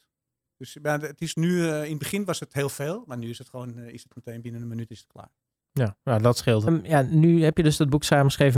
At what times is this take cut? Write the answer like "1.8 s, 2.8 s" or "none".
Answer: 6.7 s